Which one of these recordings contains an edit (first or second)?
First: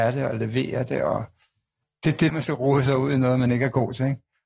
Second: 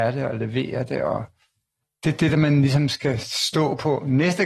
first